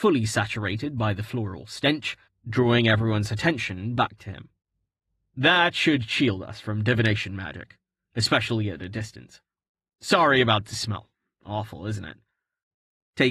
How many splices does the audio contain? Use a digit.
1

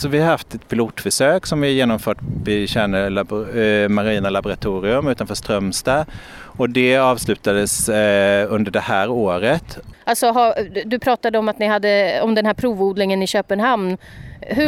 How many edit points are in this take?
1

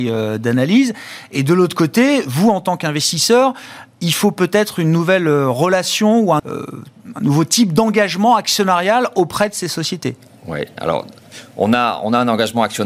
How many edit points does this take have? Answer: 1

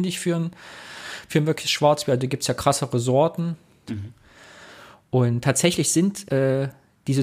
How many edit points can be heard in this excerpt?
2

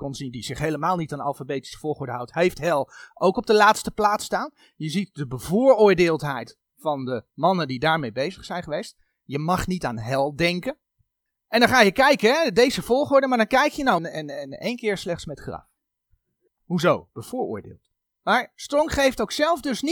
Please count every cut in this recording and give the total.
2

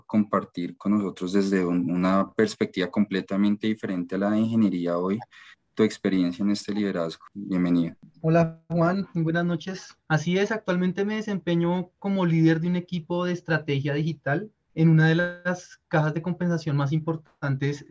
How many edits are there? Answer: 1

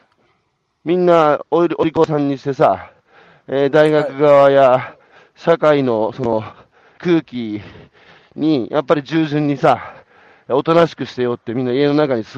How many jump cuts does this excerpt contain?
1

